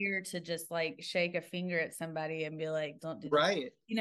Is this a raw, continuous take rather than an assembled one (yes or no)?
no